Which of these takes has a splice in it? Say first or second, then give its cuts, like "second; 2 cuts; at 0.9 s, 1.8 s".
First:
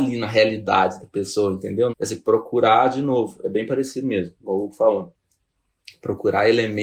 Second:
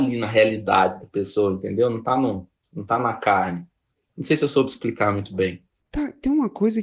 first; 1 cut; at 1.9 s